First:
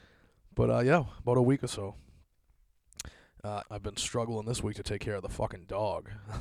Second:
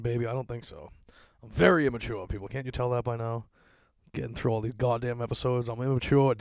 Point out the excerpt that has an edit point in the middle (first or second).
first